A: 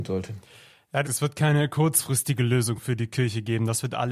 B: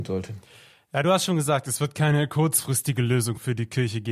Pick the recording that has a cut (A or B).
A